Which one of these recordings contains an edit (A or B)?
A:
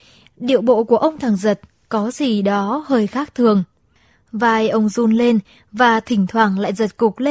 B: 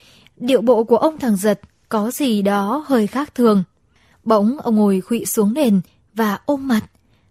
B